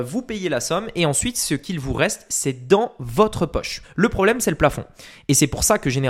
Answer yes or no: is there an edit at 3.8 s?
yes